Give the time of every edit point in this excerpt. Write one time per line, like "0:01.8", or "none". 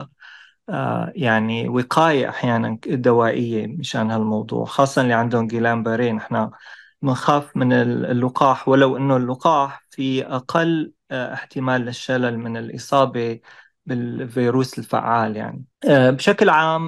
0:15.7